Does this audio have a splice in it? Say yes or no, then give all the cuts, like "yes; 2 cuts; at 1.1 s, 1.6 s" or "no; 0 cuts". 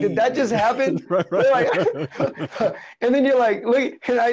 no; 0 cuts